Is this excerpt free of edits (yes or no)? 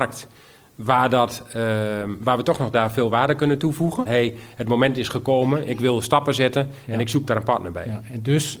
no